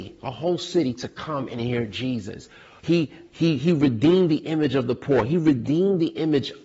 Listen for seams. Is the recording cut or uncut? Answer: cut